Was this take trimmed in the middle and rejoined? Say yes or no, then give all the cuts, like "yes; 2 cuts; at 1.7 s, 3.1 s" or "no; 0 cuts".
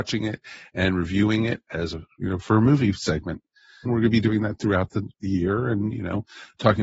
yes; 2 cuts; at 3.9 s, 5.1 s